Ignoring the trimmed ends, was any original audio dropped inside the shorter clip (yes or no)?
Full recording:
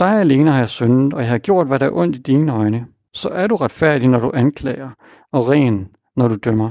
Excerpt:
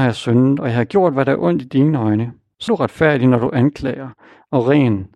yes